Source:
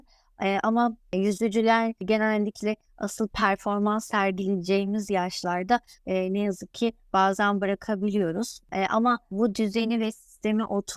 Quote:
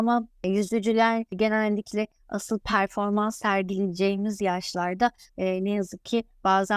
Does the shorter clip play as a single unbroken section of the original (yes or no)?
yes